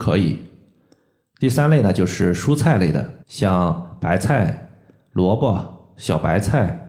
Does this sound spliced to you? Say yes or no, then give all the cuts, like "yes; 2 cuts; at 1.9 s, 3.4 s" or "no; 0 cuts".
yes; 1 cut; at 3.2 s